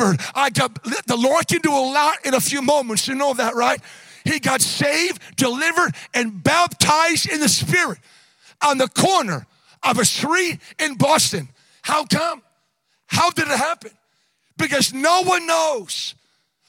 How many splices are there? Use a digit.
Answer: 0